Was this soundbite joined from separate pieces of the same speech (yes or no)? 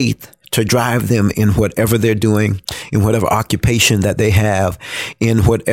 no